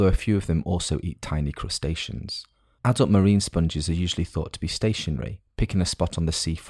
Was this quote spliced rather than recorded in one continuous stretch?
no; 0 cuts

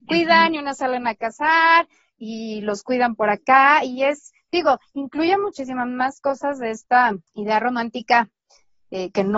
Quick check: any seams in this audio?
yes; 1 cut; at 7.3 s

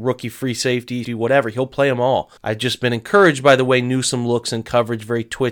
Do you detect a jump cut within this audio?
yes; 2 cuts; at 1.0 s, 2.4 s

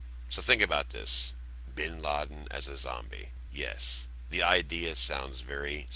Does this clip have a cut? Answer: no; 0 cuts

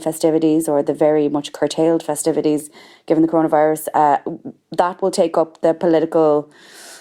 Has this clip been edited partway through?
no; 0 cuts

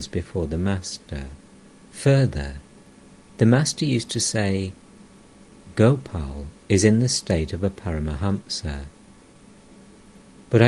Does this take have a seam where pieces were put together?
yes; 1 cut; at 1.9 s

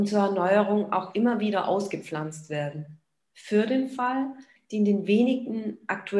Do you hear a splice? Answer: yes; 1 cut; at 4.6 s

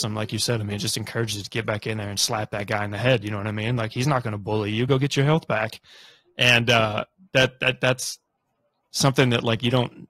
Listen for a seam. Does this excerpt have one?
no; 0 cuts

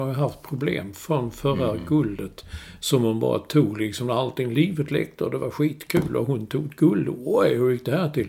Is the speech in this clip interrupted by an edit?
no; 0 cuts

